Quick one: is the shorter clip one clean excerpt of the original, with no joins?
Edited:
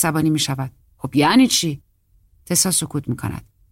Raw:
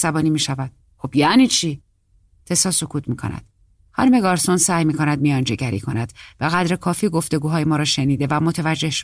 yes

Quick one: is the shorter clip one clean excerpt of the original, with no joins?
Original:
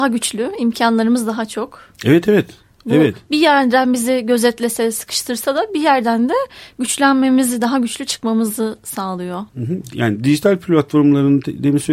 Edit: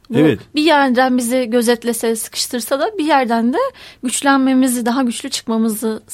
yes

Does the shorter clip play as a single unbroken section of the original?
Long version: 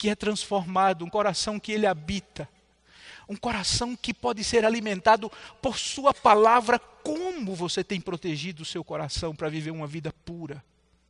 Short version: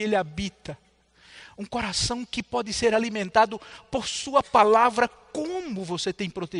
yes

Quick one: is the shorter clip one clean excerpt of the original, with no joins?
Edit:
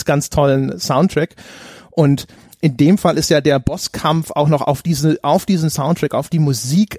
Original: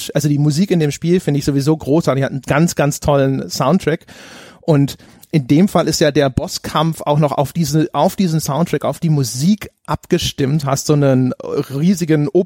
yes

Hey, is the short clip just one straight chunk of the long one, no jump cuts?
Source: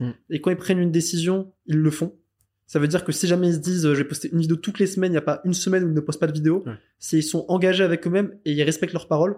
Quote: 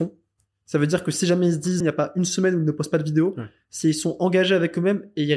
no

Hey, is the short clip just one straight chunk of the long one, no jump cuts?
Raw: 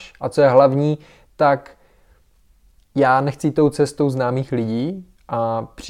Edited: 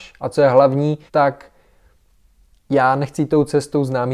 no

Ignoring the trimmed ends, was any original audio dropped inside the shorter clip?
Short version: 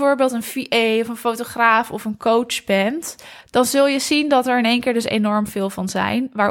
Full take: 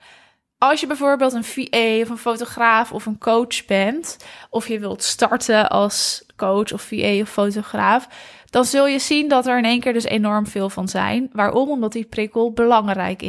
yes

